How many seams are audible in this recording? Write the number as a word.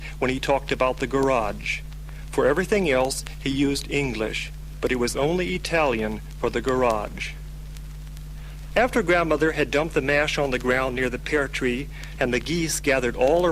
one